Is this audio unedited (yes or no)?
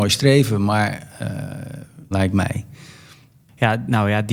no